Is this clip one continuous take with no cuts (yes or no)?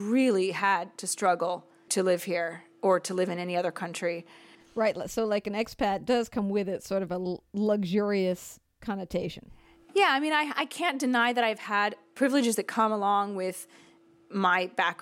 no